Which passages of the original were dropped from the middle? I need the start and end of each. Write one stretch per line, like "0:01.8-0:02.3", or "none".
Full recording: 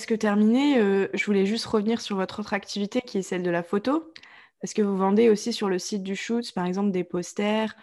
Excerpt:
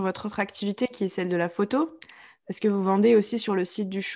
none